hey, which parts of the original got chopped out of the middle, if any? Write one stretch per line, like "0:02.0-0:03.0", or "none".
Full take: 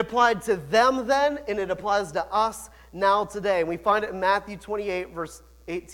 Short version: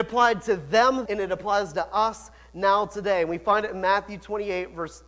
0:01.0-0:01.4

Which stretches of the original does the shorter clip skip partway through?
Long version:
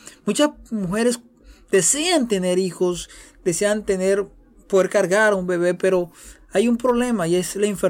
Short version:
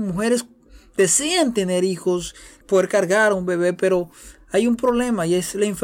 0:03.4-0:04.6

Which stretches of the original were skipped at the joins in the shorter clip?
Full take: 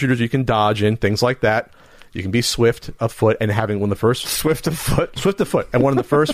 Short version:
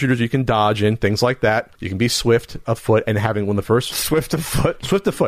0:01.7-0:02.1

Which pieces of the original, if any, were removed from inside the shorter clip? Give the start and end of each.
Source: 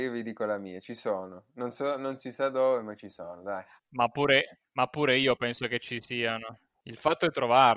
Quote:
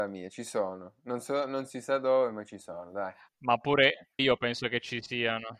0:04.7-0:05.2

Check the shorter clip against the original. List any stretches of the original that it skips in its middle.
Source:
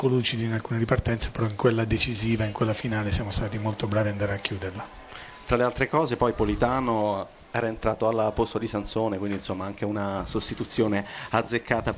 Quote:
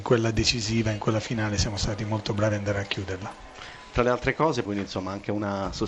0:06.2-0:09.2

